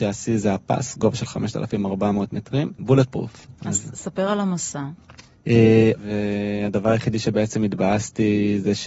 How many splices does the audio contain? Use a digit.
2